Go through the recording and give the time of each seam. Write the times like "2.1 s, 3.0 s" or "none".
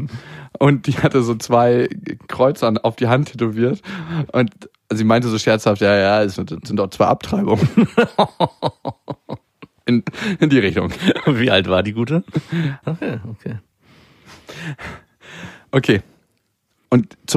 6.4 s, 12.8 s